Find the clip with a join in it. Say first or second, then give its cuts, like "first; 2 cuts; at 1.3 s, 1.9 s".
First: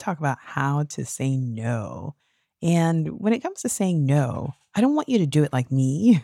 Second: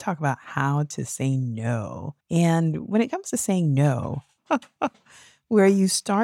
second; 2 cuts; at 2.2 s, 4.4 s